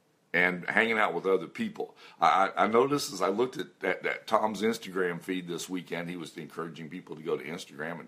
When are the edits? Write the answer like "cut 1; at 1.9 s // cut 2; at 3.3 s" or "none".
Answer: none